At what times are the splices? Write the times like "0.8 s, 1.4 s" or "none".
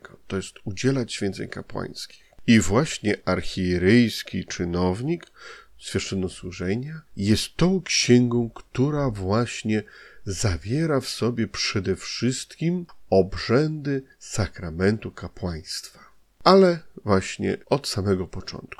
7.1 s, 17.6 s